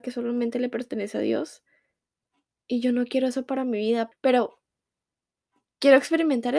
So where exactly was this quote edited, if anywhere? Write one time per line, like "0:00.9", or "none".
0:04.1